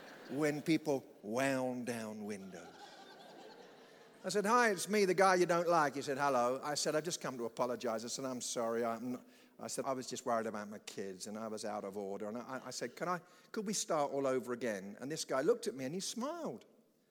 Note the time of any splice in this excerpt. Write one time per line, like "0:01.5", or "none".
0:09.8